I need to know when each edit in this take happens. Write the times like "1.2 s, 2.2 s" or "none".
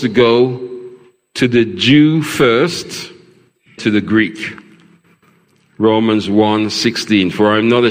3.8 s